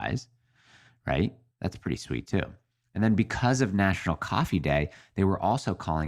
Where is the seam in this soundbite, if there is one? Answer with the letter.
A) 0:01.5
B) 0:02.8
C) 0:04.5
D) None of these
A